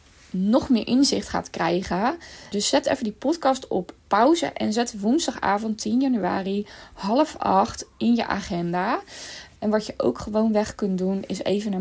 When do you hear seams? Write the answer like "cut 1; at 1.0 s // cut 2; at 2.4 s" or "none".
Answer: cut 1; at 2.5 s // cut 2; at 9.6 s